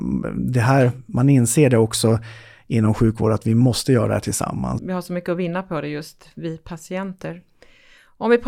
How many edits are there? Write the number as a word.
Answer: one